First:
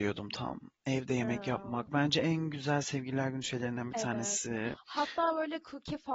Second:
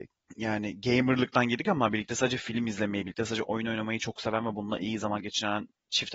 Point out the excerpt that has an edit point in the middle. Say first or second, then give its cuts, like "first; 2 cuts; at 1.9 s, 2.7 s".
second; 1 cut; at 3.4 s